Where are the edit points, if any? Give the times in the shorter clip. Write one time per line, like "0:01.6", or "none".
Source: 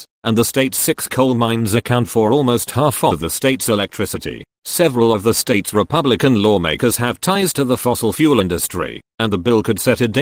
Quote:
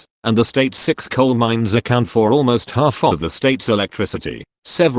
none